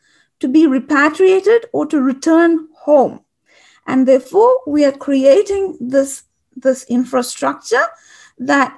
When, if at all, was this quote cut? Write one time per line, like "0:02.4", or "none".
none